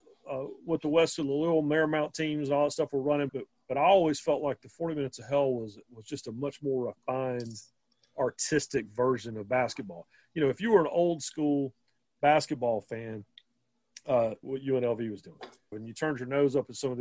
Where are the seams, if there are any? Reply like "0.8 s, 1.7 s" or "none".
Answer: 3.3 s, 14.4 s, 15.7 s